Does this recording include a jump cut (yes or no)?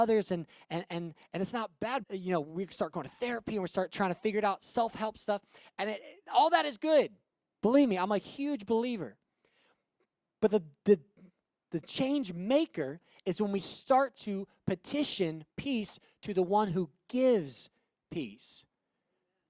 yes